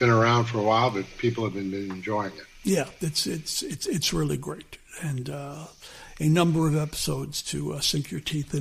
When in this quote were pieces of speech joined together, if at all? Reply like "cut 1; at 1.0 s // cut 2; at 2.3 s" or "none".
none